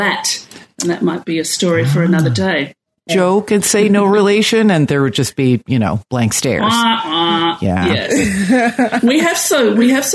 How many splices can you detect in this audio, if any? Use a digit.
1